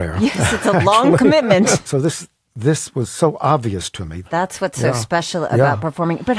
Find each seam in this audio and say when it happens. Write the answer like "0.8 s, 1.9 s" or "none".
1.9 s, 4.2 s